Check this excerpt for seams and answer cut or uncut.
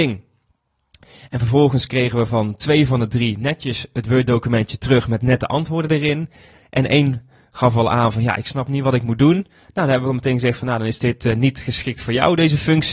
uncut